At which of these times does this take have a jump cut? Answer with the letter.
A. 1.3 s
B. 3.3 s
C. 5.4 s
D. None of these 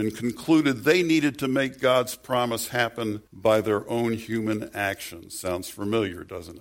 B